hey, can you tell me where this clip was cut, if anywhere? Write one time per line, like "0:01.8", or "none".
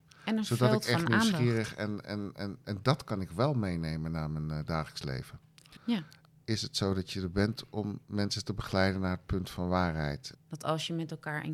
0:05.8
0:10.3